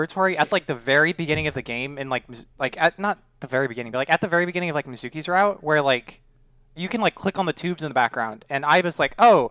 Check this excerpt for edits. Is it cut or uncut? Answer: uncut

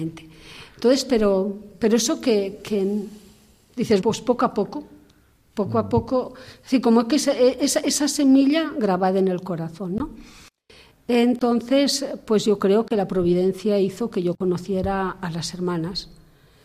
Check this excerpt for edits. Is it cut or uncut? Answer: cut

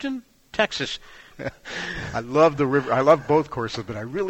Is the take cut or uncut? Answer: cut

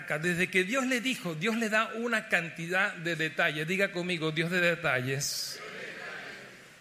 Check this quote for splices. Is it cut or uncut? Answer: uncut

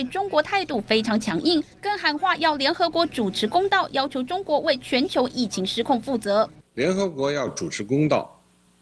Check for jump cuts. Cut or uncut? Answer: uncut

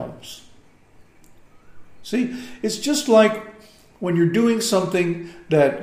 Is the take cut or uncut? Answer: uncut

